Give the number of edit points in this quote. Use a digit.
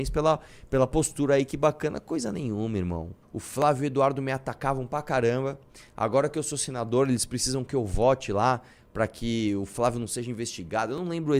1